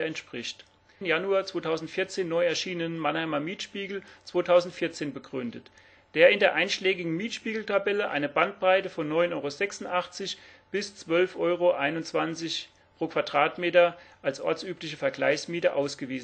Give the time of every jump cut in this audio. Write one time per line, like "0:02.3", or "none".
0:01.0